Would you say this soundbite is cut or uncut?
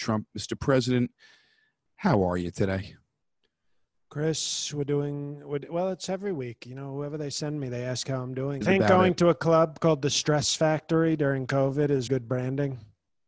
cut